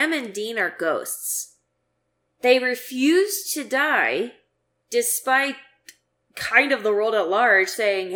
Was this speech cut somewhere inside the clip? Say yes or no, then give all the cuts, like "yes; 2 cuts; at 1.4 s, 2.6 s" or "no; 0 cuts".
yes; 1 cut; at 2.3 s